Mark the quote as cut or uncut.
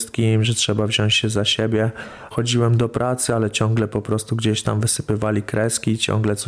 cut